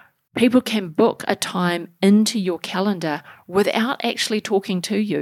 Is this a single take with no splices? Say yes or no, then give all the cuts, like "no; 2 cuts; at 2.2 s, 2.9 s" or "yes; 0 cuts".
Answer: yes; 0 cuts